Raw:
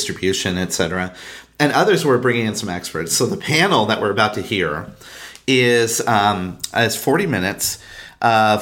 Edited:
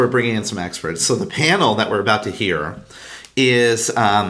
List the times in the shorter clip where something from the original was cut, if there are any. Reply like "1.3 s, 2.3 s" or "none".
none